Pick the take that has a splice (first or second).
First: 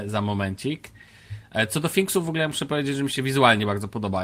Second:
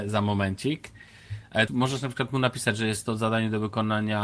second